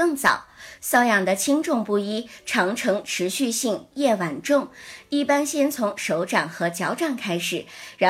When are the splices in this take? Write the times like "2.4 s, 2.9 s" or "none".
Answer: 3.9 s